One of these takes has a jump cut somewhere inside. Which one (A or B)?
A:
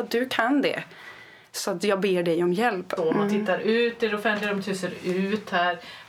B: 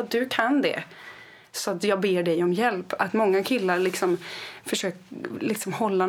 A